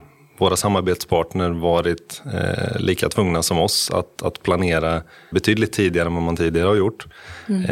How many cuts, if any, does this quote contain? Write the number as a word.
one